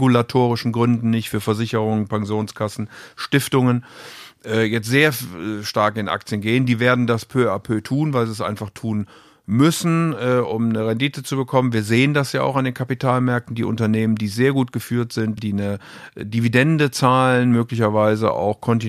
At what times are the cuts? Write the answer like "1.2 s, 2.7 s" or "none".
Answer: 15.4 s